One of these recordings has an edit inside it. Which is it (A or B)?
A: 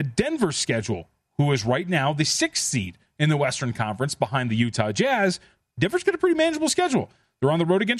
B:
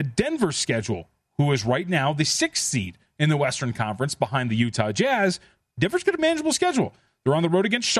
B